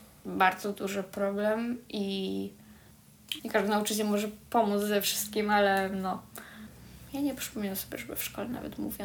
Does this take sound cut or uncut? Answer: cut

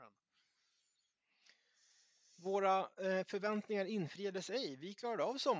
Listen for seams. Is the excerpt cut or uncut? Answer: uncut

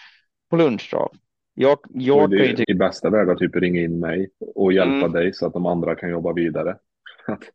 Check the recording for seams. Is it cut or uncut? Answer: cut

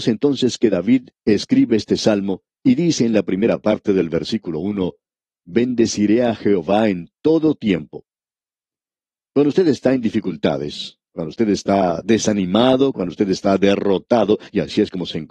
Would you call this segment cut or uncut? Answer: uncut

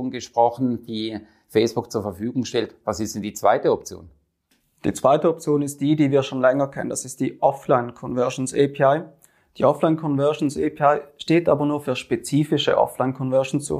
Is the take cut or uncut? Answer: uncut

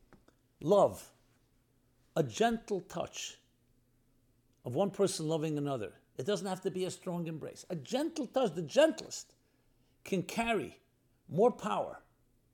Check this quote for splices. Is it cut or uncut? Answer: uncut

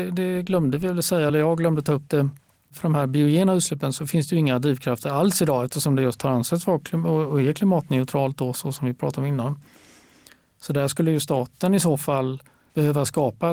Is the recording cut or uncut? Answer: uncut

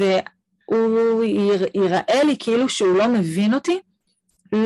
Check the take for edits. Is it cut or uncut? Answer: uncut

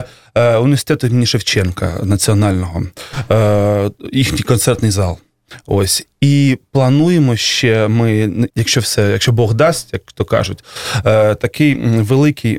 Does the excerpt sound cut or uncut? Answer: cut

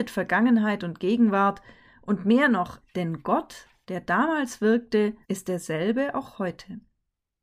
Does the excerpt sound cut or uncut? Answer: cut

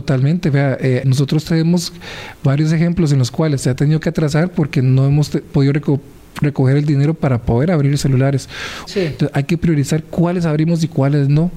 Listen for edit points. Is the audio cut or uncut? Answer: cut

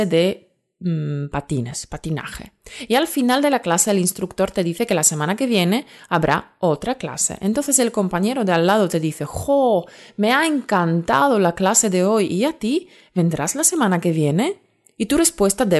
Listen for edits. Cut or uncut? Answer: uncut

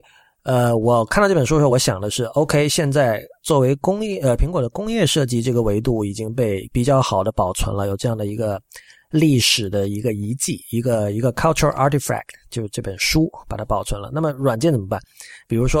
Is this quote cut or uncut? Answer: uncut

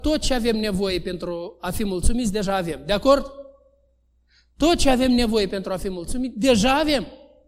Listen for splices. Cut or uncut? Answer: uncut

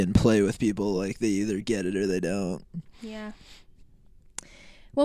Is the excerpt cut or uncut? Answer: uncut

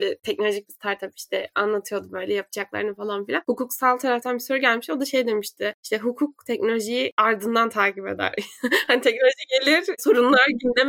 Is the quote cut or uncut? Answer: uncut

